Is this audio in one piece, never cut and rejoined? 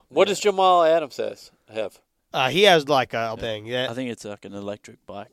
no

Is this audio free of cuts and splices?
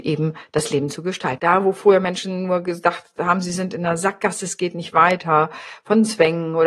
no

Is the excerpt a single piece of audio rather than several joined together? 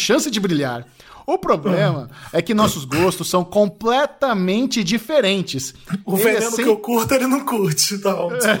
yes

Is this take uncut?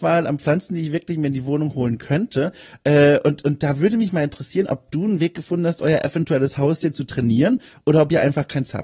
yes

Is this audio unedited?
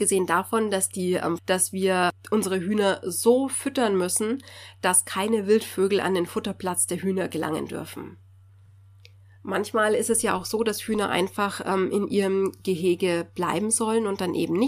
no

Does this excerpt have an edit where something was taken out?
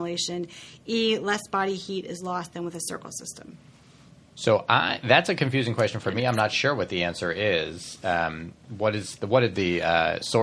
no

